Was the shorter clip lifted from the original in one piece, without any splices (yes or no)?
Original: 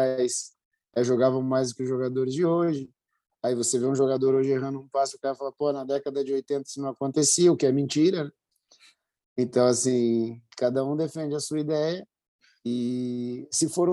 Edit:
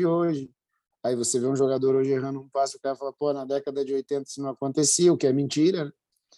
yes